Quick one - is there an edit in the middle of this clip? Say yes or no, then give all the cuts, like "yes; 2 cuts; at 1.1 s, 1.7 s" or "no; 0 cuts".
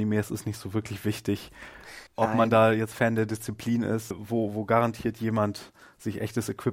yes; 2 cuts; at 2.1 s, 4.1 s